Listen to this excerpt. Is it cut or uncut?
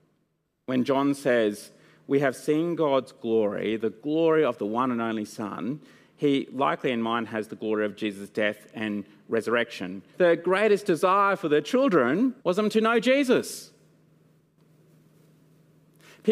cut